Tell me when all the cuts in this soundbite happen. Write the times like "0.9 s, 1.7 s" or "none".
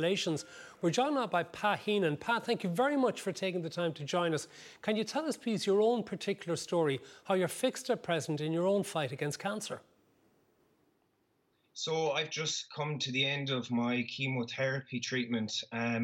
none